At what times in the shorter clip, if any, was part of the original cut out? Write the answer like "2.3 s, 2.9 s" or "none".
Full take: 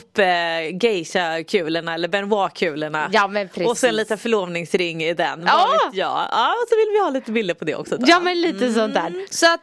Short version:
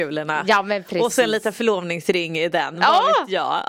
none